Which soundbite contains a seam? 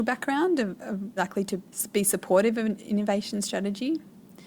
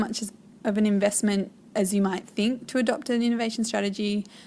first; 1 cut; at 1.2 s

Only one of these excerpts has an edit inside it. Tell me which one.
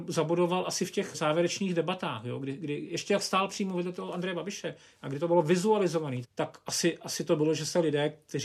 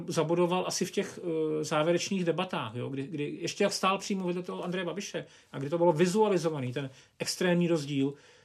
first; 2 cuts; at 1.1 s, 6.2 s

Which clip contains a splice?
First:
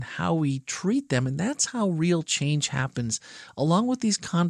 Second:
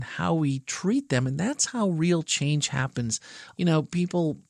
second; 1 cut; at 3.5 s

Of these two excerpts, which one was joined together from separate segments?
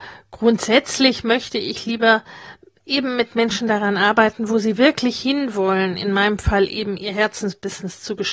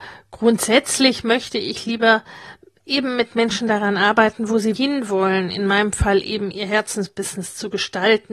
second; 1 cut; at 4.8 s

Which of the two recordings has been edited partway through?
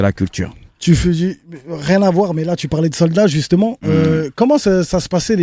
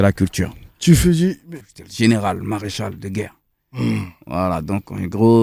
second; 1 cut; at 1.6 s

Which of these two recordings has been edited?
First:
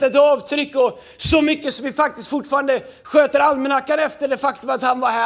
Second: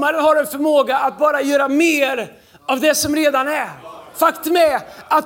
second; 1 cut; at 4.1 s

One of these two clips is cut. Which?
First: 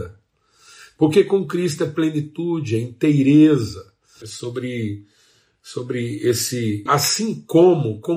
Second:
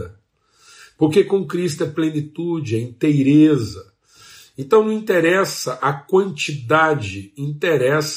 first; 2 cuts; at 4.2 s, 6.9 s

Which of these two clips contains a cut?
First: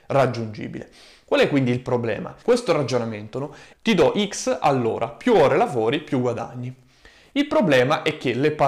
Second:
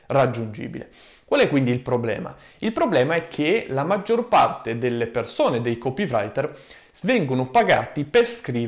first; 2 cuts; at 2.4 s, 3.7 s

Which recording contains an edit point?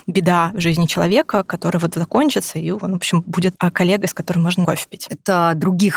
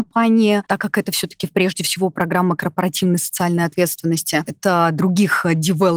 first; 1 cut; at 5.1 s

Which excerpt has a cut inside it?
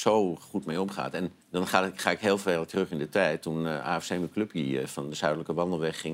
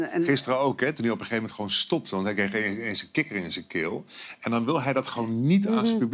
first; 1 cut; at 1.4 s

